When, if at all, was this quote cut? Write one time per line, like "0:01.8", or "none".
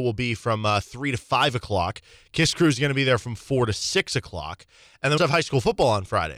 0:05.2